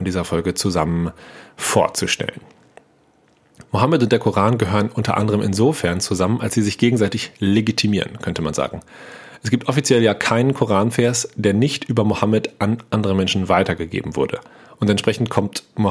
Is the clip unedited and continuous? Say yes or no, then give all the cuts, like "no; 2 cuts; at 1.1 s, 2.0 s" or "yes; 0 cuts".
yes; 0 cuts